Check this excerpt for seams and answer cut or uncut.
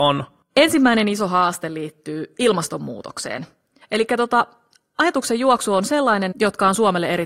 cut